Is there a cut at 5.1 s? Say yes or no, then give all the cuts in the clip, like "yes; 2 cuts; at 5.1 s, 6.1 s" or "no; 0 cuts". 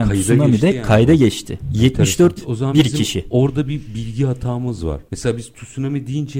no; 1 cut; at 2.4 s